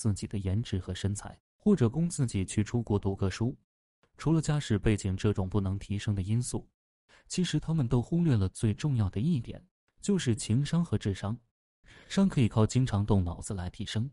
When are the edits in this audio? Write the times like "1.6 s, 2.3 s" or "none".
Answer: none